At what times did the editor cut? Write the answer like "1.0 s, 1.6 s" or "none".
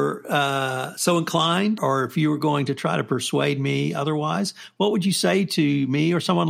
1.8 s